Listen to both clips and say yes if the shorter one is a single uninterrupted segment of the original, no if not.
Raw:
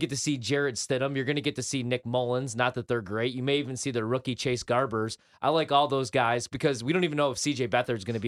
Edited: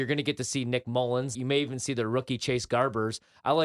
no